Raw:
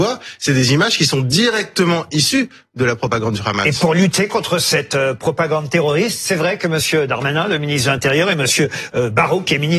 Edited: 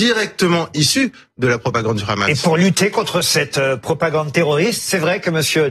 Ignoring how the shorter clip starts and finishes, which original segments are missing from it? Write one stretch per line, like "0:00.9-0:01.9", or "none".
none